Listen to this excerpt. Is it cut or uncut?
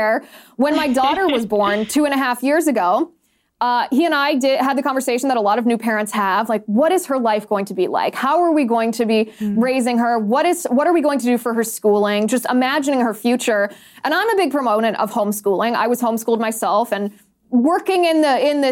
uncut